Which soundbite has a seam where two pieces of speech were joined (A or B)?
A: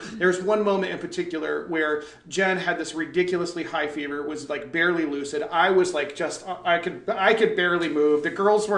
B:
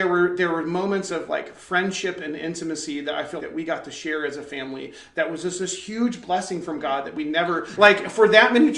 B